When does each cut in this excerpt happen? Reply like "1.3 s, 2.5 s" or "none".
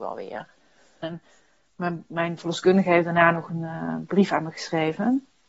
1.0 s